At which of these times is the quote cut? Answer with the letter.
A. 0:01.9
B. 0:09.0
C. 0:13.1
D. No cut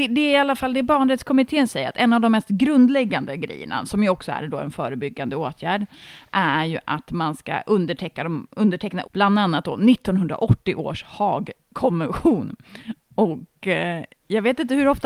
B